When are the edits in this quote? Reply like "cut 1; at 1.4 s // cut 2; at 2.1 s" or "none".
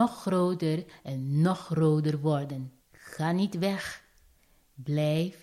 cut 1; at 2.8 s